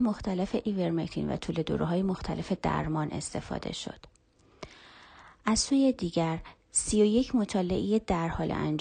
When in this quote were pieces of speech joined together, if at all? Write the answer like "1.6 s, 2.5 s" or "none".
none